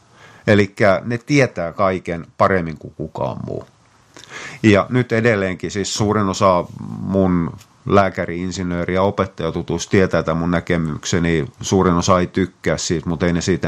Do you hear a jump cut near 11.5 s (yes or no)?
yes